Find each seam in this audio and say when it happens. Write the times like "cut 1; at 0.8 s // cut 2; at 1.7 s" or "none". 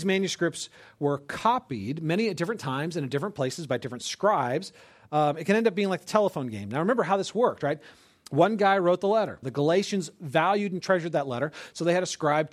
cut 1; at 9.4 s